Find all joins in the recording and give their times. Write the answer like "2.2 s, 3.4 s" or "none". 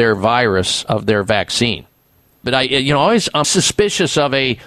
2.4 s, 3.4 s